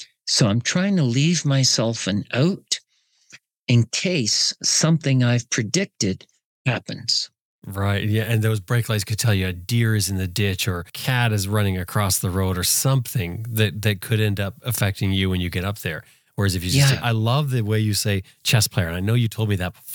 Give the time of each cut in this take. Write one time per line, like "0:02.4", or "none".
0:17.0